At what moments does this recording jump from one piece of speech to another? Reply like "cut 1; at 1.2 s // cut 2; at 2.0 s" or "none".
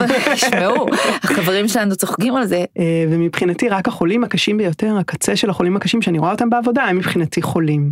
cut 1; at 2.7 s